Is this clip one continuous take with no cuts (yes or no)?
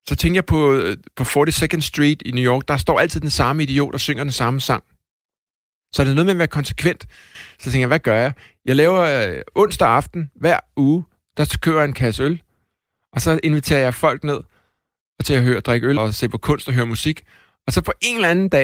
no